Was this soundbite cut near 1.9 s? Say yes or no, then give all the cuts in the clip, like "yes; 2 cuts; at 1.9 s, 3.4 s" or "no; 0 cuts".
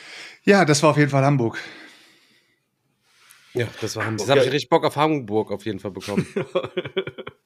no; 1 cut; at 4.2 s